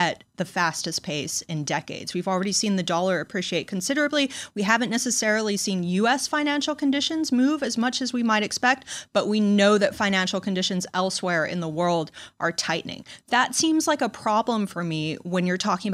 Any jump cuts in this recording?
no; 0 cuts

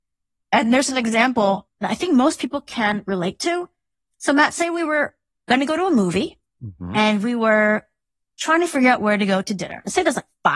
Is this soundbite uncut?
yes; 0 cuts

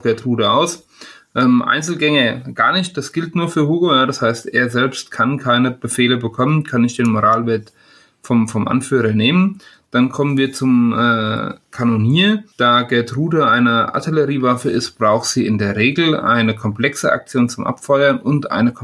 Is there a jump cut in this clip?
no; 0 cuts

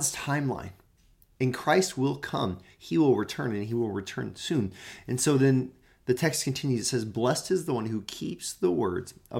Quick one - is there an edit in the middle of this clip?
no; 0 cuts

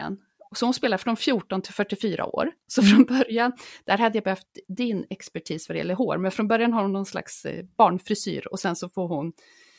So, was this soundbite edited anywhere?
no; 0 cuts

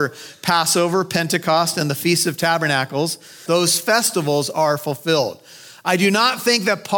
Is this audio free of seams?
no; 1 cut; at 3.5 s

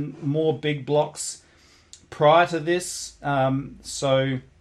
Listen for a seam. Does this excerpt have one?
no; 0 cuts

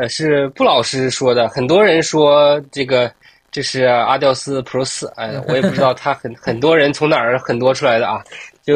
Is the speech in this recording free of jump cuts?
yes; 0 cuts

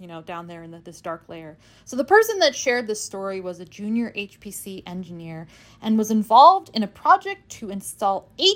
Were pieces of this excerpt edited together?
no; 0 cuts

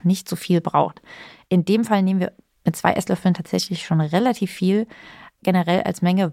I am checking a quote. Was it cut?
no; 0 cuts

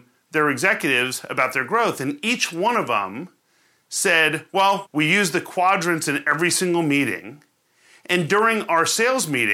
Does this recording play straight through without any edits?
no; 1 cut; at 4.9 s

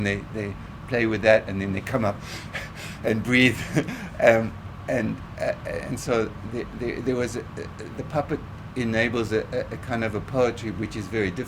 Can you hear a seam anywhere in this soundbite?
no; 0 cuts

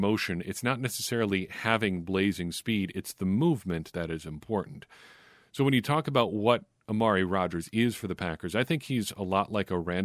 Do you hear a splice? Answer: yes; 1 cut; at 3.9 s

